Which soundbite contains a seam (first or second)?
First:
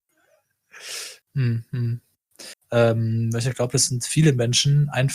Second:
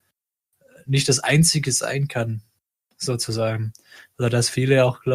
first